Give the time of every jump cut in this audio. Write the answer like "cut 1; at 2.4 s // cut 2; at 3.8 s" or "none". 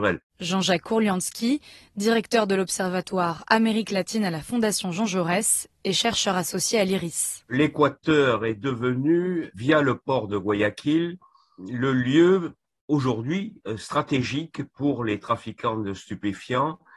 none